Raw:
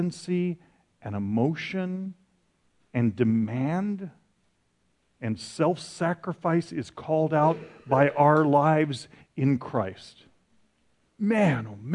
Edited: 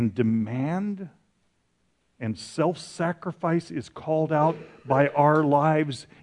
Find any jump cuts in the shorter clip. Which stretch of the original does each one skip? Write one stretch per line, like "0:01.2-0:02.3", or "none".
none